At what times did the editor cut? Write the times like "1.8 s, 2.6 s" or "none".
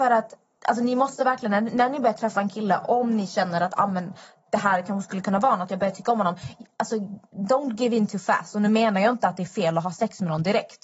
2.8 s

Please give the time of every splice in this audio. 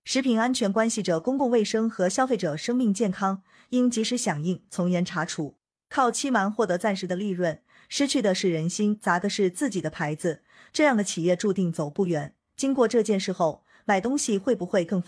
none

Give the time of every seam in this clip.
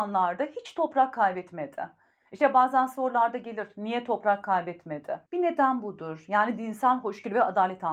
5.3 s

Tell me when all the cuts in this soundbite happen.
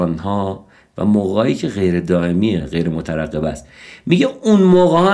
2.6 s

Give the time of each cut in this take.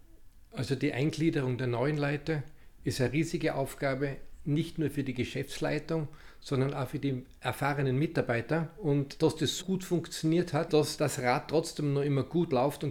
9.6 s, 10.7 s

